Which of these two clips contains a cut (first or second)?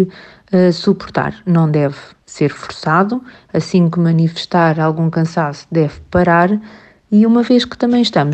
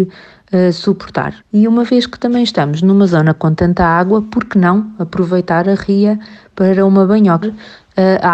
second